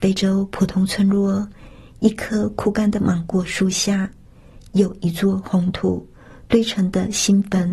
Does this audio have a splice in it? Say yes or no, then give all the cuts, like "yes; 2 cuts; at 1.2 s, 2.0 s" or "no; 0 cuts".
no; 0 cuts